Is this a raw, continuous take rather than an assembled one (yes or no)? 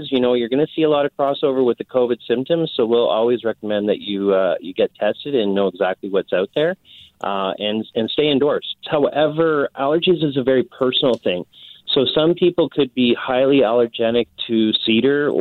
no